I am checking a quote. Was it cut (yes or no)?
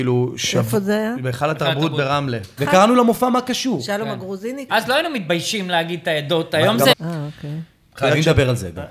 yes